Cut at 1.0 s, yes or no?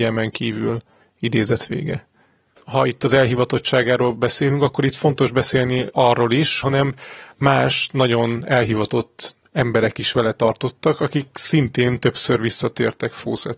yes